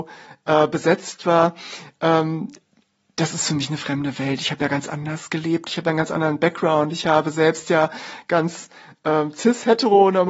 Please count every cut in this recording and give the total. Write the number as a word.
zero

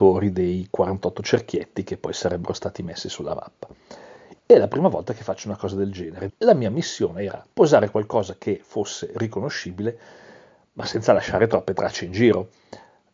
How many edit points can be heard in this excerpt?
three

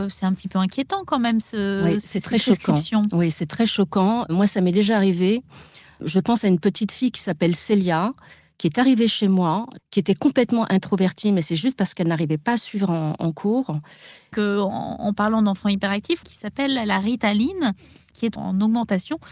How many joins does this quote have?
two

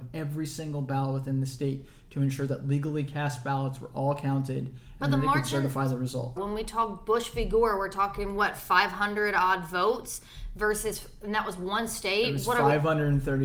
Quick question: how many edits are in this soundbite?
one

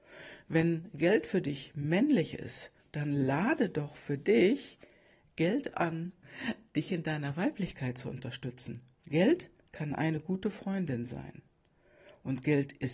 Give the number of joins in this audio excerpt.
two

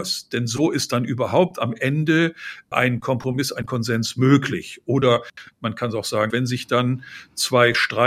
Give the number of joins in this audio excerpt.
one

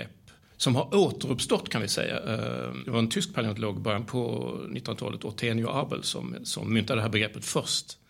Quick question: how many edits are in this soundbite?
zero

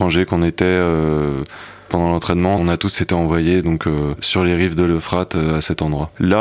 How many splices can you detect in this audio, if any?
zero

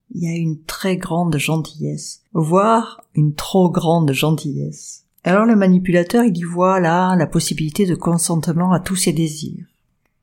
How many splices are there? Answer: two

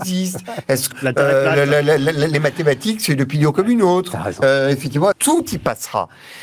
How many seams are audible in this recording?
two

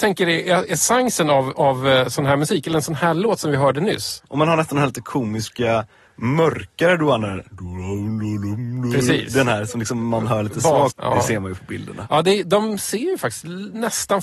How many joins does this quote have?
two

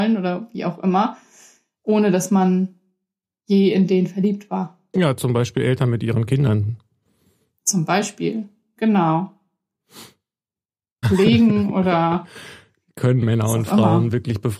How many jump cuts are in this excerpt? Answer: one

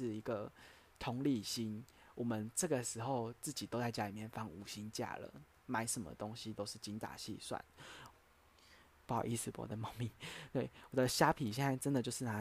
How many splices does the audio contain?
one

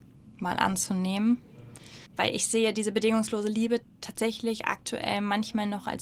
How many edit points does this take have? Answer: one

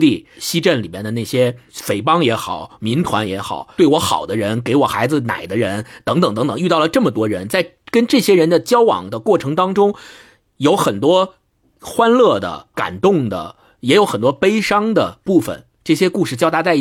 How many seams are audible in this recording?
zero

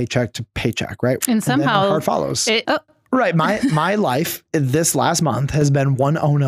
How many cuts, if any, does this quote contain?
two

